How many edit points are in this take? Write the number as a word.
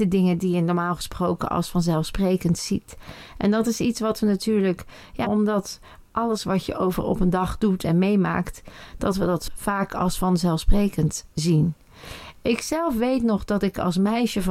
one